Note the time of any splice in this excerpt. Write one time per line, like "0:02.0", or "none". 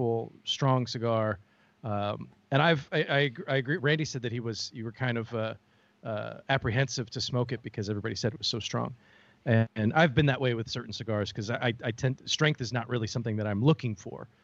none